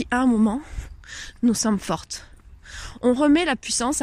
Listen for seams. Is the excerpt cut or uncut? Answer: uncut